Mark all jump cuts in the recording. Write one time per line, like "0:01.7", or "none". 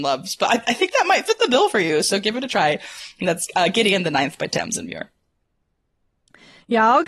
none